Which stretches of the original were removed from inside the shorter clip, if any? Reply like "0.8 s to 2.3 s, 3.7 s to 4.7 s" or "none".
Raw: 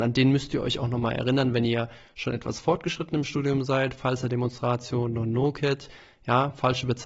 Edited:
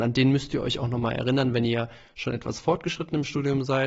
none

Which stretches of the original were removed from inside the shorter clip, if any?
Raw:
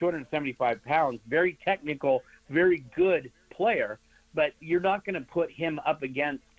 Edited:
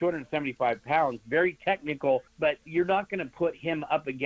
2.3 s to 4.2 s

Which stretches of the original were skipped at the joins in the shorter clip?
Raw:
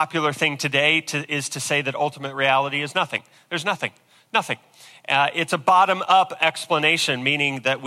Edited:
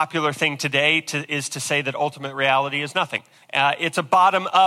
3.4 s to 5.0 s

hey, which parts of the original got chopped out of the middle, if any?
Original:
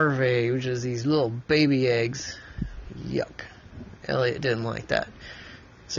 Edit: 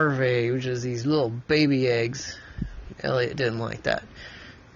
2.9 s to 4.0 s

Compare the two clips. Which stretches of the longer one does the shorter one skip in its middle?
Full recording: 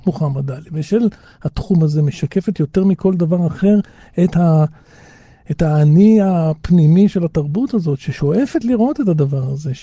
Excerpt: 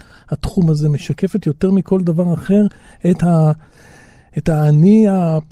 none

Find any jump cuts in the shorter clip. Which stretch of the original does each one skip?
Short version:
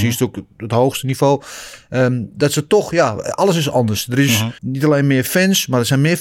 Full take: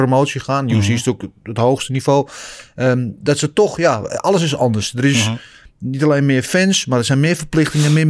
5.4 s to 5.8 s

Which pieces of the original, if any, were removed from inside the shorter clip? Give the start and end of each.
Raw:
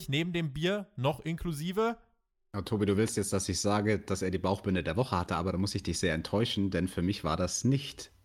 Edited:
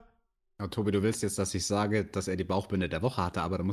none

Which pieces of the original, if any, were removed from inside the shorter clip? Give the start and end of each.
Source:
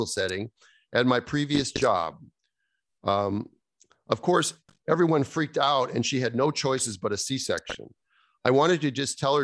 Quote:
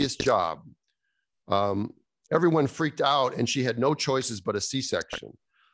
3.8 s to 4.8 s

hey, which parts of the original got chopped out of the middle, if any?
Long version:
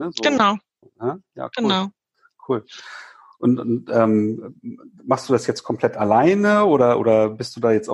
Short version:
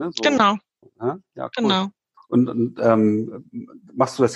2.2 s to 3.3 s

